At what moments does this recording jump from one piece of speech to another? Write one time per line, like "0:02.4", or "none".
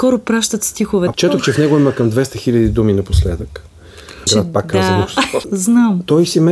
0:01.1
0:04.3
0:05.4